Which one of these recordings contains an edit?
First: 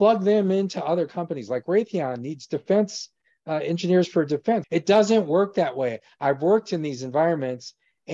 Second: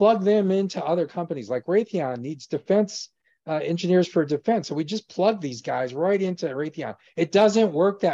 first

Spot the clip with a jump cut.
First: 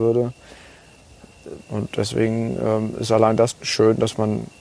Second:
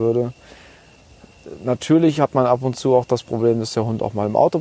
first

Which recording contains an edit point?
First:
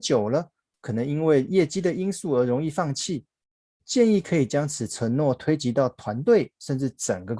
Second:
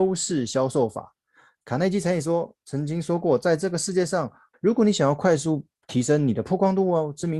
second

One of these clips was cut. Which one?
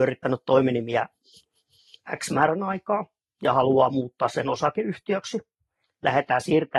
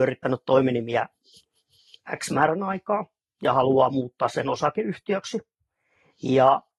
first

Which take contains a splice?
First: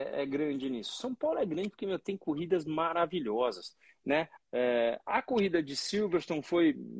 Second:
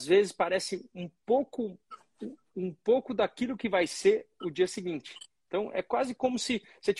first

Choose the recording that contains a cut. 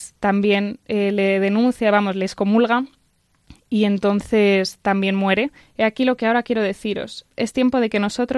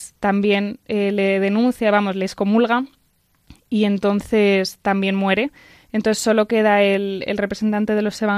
first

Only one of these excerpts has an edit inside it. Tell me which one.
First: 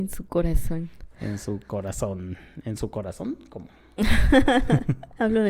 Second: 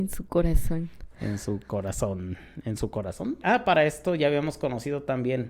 second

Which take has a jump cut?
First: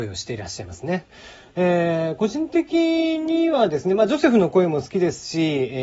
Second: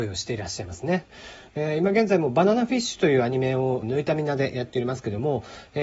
second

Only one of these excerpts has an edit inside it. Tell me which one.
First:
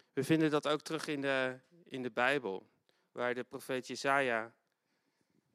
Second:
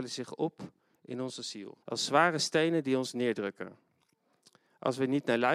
second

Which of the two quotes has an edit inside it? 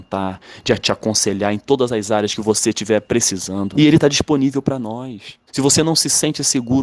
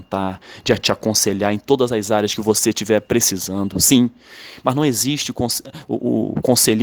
first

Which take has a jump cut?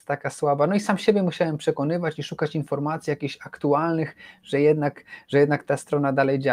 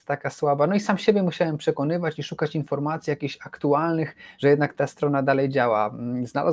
second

